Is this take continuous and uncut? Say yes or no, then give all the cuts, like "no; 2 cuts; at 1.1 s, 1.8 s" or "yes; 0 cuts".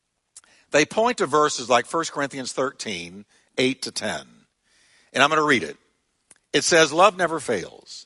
yes; 0 cuts